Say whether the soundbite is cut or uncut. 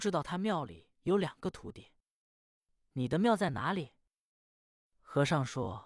uncut